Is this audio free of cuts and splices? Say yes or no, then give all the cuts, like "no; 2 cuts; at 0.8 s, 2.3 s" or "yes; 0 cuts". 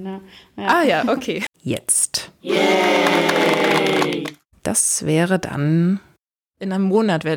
no; 2 cuts; at 1.5 s, 4.6 s